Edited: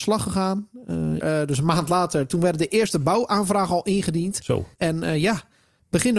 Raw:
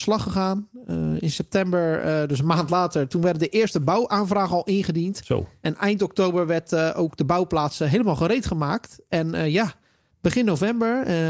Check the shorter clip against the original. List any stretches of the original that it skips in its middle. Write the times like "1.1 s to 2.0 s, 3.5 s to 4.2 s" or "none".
1.2 s to 2.0 s, 5.5 s to 9.0 s